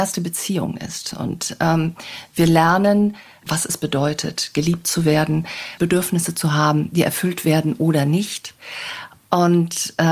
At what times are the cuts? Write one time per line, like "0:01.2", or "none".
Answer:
0:03.4
0:05.8